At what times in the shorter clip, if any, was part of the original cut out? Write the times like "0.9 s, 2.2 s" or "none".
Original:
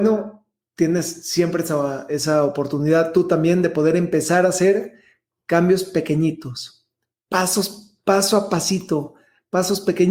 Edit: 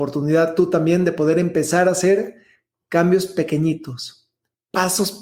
none